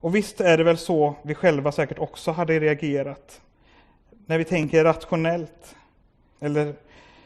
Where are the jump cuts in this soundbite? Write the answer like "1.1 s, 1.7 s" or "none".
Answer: 6.4 s